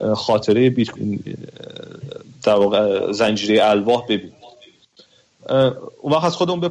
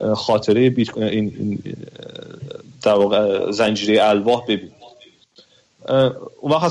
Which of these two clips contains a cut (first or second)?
first